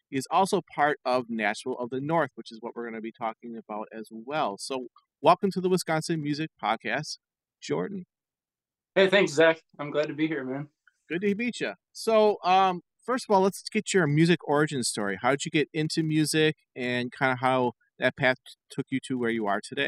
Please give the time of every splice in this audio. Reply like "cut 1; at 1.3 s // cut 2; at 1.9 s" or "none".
none